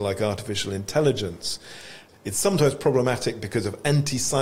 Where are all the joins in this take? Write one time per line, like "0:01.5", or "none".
0:02.1